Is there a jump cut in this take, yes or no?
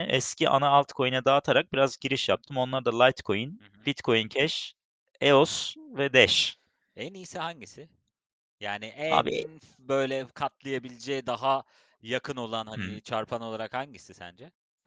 no